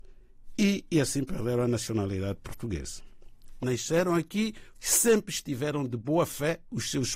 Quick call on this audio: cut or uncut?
cut